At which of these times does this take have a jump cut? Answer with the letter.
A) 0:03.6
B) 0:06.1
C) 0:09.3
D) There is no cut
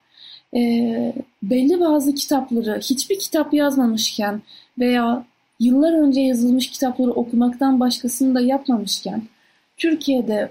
D